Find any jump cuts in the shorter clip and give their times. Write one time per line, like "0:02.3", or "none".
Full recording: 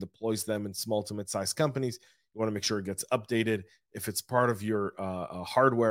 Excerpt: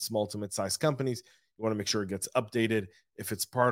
none